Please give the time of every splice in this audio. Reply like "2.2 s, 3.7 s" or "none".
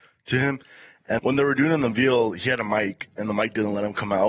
1.2 s